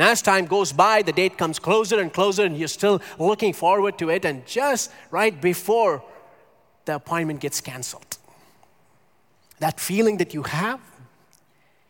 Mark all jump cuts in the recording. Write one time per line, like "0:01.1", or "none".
none